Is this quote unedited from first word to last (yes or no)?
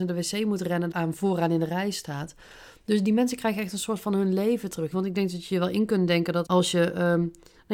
no